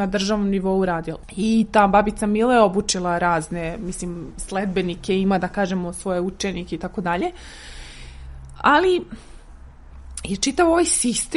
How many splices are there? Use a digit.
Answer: 0